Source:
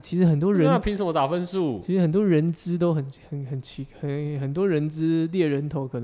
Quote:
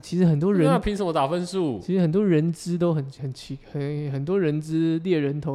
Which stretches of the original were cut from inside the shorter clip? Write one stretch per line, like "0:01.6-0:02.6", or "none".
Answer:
0:03.2-0:03.5